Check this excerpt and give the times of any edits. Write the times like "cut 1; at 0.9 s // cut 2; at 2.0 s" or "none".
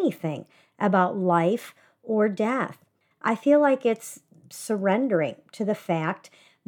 cut 1; at 3.1 s